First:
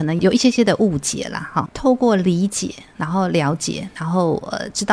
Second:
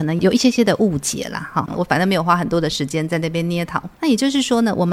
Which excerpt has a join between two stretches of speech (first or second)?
second